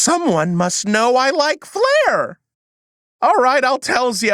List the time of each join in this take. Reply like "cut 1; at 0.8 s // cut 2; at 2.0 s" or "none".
none